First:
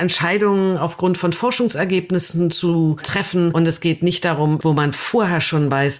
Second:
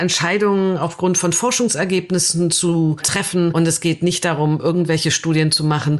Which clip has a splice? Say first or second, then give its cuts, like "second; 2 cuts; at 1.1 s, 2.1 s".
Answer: first; 1 cut; at 4.6 s